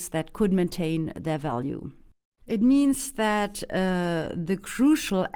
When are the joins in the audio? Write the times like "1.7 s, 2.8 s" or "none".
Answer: 2.4 s